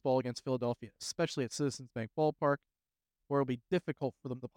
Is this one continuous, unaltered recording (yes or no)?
yes